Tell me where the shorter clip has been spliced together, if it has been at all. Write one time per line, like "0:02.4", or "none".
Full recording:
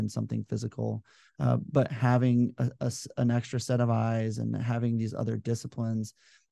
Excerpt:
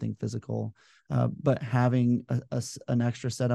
none